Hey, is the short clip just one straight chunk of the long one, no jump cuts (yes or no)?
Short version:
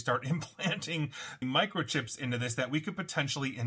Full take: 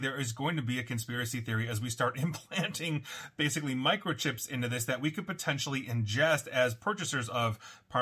no